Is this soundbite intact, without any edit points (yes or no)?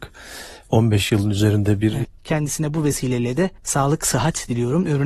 no